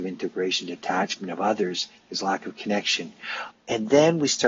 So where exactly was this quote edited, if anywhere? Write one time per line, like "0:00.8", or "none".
0:03.5

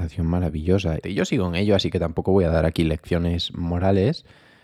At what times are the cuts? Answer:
0:01.0

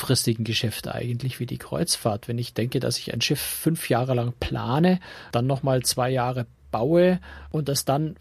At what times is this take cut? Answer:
none

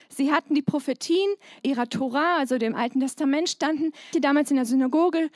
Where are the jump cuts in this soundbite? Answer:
0:01.6
0:04.1

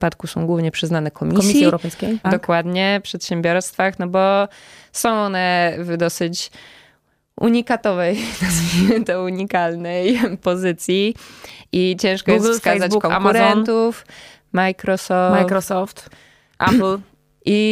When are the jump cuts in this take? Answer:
0:02.2

